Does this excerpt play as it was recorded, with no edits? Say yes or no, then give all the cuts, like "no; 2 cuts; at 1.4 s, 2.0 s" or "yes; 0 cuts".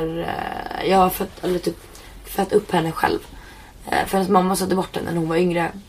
yes; 0 cuts